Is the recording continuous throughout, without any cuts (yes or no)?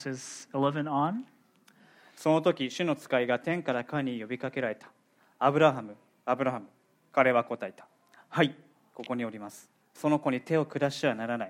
no